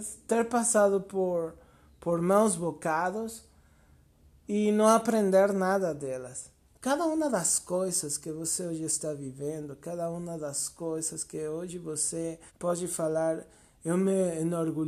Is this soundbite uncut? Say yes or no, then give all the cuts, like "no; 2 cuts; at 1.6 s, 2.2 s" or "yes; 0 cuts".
no; 2 cuts; at 6.6 s, 12.5 s